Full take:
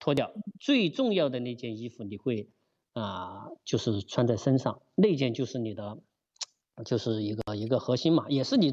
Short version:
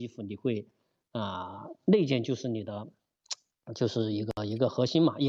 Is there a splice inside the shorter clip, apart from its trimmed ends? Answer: yes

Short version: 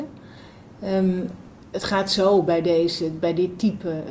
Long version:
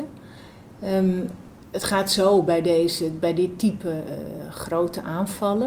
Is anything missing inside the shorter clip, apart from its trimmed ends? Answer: no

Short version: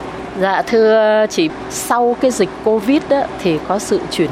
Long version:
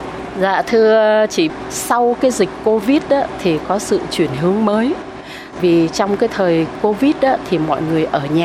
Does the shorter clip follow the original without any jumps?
yes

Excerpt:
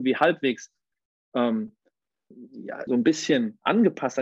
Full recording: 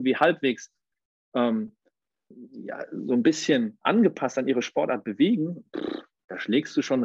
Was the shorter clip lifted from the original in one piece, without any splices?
no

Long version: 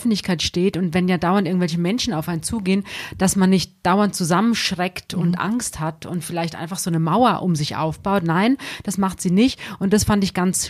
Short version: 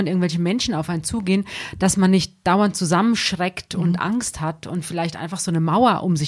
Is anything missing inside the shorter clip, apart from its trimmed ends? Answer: no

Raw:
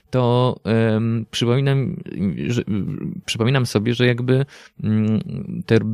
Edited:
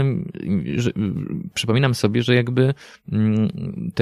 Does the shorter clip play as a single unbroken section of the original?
yes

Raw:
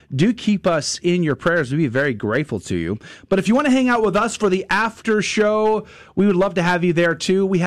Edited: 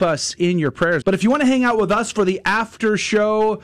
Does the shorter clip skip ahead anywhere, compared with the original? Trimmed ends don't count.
yes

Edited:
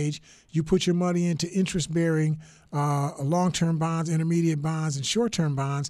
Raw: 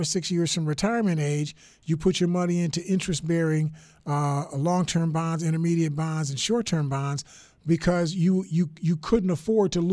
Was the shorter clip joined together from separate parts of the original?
no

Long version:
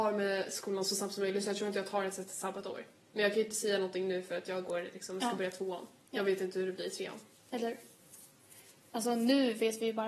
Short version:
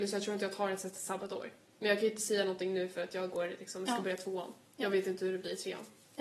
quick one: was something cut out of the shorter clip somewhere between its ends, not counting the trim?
no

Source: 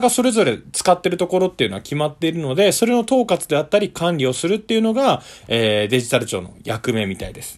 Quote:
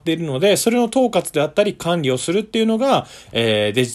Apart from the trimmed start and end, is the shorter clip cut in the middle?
no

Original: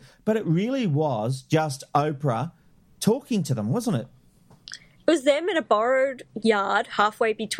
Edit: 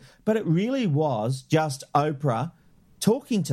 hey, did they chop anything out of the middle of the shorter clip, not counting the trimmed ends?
no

